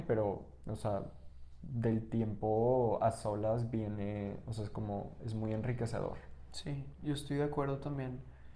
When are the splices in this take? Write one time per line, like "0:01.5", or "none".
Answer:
none